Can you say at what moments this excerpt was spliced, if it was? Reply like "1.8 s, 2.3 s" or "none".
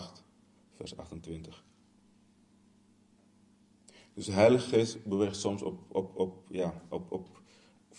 none